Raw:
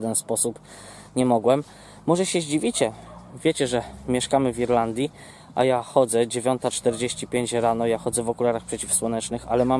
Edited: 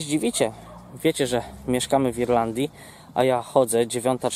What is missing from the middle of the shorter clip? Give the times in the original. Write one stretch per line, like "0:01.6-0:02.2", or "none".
none

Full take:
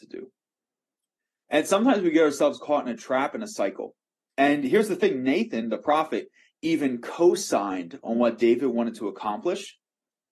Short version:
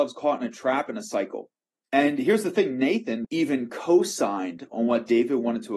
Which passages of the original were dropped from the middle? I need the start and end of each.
0:05.7-0:06.6

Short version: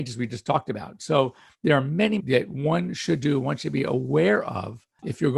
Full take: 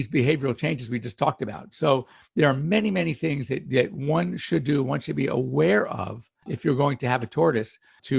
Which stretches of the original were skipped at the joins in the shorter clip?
0:02.9-0:03.6

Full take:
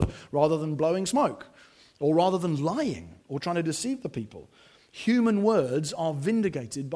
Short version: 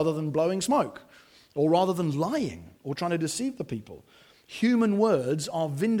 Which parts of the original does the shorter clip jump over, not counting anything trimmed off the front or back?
none

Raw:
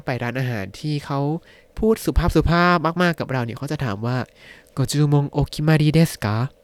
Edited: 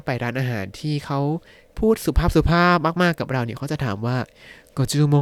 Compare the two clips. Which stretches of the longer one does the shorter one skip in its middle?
none

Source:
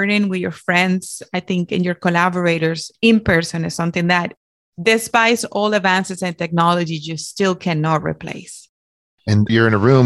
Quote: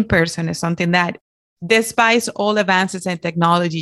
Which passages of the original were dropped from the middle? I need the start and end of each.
none

